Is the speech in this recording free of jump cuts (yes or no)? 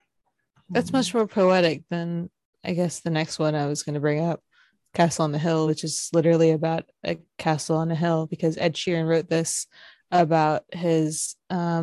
yes